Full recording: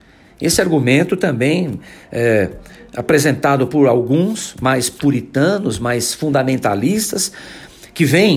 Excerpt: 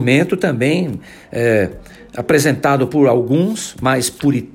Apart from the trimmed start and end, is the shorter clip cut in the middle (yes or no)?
no